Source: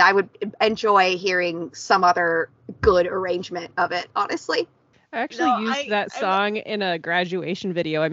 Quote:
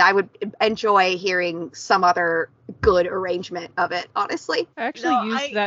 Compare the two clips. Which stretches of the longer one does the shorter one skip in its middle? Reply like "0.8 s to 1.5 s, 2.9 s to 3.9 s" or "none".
4.7 s to 5.1 s